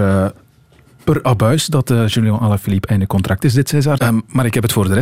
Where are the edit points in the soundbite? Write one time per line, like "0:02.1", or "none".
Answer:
0:04.0